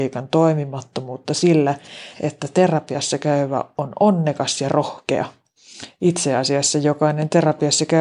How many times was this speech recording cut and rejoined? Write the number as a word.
one